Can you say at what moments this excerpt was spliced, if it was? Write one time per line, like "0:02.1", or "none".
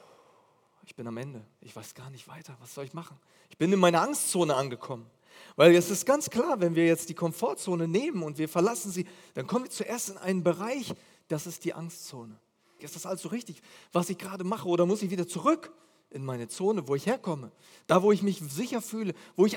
0:12.8